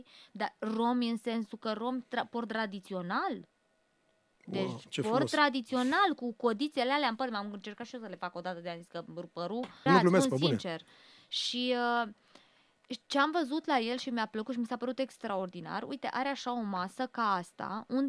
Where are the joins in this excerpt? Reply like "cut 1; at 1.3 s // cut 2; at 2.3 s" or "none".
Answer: cut 1; at 9.9 s